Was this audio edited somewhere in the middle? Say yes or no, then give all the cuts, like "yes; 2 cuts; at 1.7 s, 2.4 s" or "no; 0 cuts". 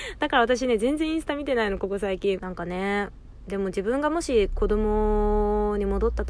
yes; 1 cut; at 2.4 s